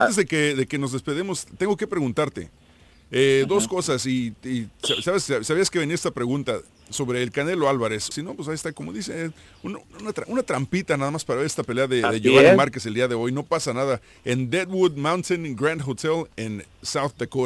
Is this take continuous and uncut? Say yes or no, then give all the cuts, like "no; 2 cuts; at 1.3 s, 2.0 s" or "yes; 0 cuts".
no; 1 cut; at 8.1 s